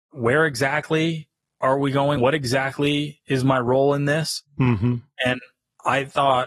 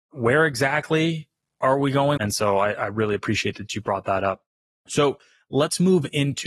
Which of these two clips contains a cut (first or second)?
second